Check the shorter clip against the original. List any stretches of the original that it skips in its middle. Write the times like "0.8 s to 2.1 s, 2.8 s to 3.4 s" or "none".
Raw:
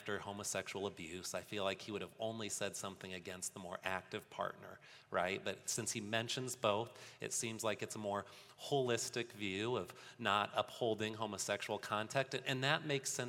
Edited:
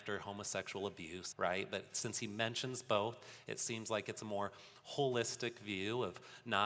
1.3 s to 5.0 s